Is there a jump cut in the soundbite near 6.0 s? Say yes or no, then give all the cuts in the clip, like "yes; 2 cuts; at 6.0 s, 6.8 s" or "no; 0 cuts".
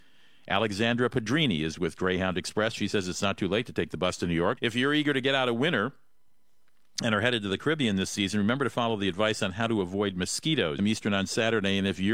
no; 2 cuts; at 4.6 s, 10.8 s